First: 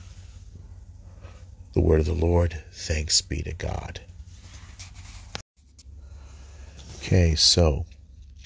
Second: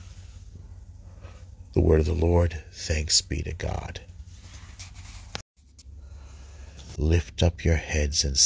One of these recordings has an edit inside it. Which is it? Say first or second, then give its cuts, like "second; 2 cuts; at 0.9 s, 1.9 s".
second; 1 cut; at 7.0 s